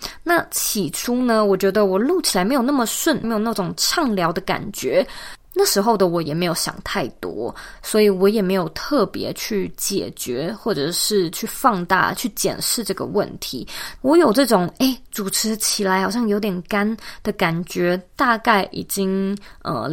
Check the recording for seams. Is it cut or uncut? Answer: cut